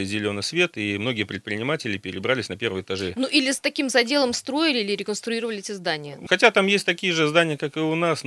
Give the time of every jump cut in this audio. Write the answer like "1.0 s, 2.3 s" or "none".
6.3 s